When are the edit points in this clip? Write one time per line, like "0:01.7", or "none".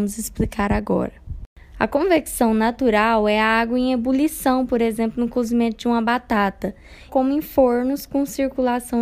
0:01.7
0:07.1